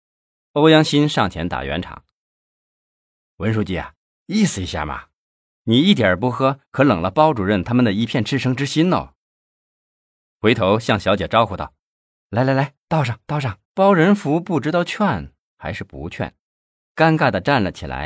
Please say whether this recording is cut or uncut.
cut